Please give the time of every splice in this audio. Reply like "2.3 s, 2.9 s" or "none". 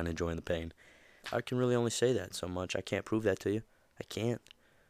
1.2 s